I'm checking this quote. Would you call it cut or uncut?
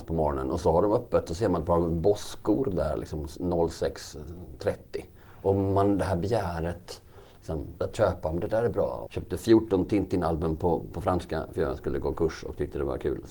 cut